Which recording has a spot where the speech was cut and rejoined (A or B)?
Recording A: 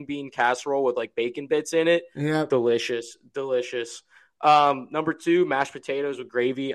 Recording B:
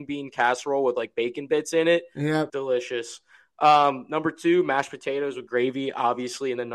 B